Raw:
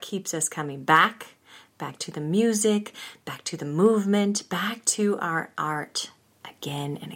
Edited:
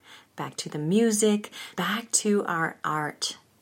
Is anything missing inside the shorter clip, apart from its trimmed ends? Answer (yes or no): yes